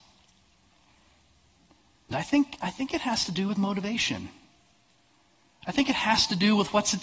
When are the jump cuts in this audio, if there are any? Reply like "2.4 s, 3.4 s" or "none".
2.1 s

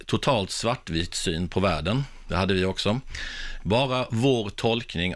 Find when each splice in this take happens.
3.6 s

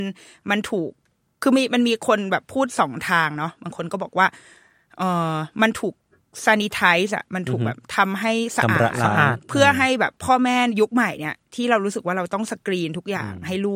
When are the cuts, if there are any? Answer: none

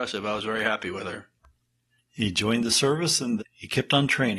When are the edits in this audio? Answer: 2.0 s, 3.4 s

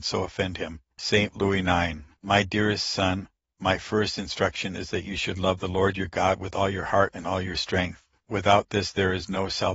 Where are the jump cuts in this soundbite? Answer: none

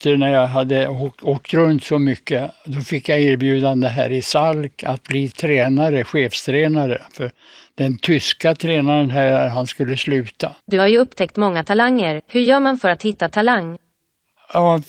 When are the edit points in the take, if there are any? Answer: 10.6 s

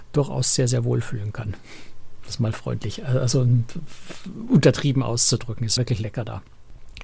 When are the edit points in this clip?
5.8 s

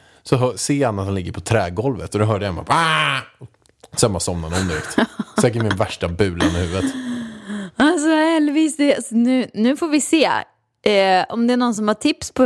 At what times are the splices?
2.1 s

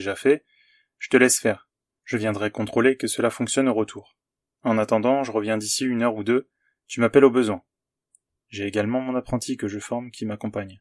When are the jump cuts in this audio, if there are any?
5.2 s, 8.4 s

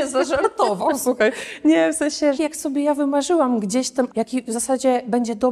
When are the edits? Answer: 2.4 s, 4.1 s

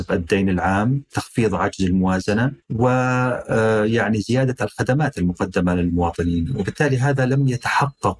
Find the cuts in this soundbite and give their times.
2.6 s

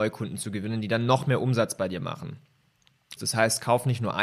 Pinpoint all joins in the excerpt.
3.2 s

